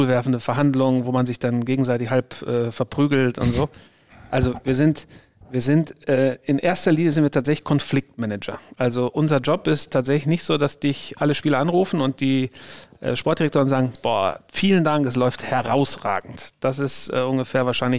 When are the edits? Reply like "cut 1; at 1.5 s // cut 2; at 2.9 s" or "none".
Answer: none